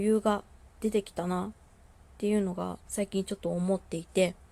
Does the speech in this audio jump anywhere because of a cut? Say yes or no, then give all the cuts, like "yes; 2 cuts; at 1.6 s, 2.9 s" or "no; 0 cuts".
yes; 1 cut; at 2.8 s